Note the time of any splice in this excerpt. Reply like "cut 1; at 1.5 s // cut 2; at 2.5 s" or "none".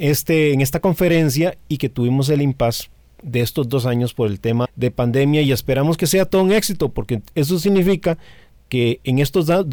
cut 1; at 4.6 s